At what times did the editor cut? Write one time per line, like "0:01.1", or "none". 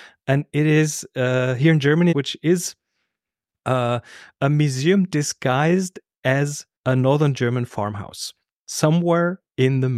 0:02.1
0:06.8